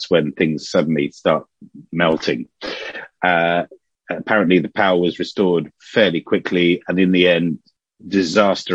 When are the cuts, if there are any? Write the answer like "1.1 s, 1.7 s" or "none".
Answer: none